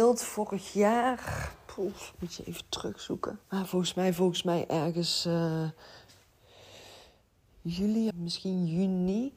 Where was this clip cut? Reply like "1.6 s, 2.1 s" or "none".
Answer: 3.4 s, 8.1 s